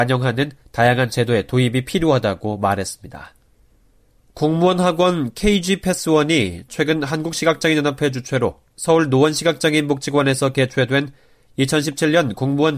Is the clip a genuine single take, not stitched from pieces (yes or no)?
yes